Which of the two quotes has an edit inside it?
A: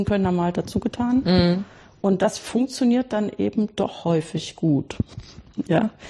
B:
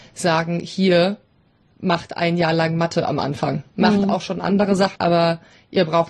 B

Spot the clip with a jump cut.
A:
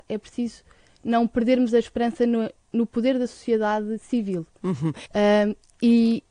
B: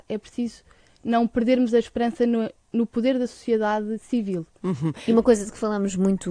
A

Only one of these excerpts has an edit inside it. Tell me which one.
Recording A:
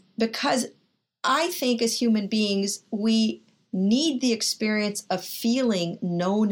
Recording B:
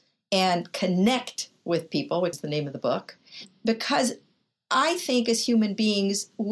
B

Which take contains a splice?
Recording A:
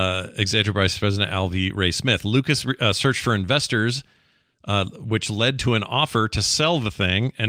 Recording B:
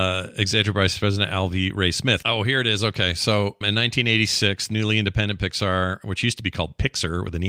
B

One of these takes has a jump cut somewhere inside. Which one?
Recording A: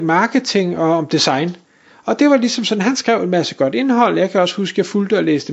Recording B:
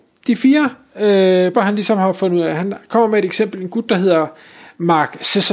B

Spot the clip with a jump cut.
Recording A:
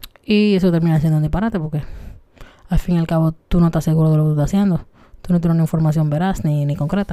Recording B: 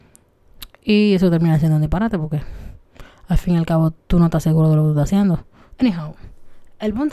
B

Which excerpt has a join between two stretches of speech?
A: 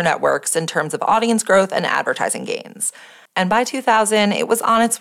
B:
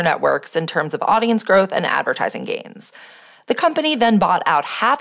A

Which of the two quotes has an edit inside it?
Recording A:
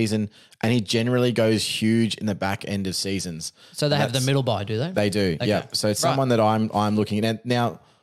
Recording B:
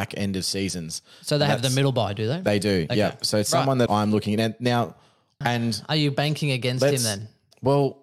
B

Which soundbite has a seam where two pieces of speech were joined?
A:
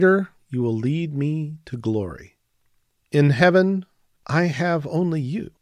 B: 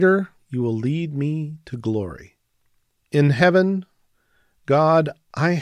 A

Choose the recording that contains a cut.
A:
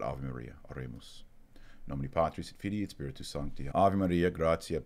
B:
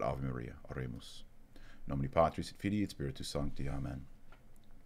A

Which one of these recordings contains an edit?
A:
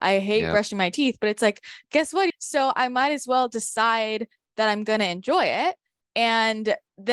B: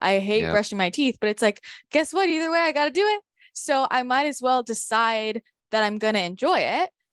A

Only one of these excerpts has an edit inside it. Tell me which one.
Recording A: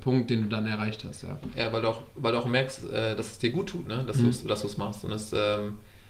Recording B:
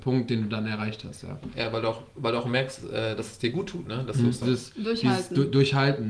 B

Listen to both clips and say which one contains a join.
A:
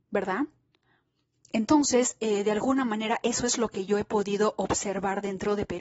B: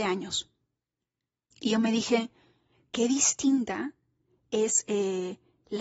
B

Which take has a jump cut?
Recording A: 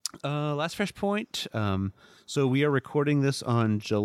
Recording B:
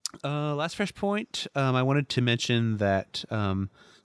A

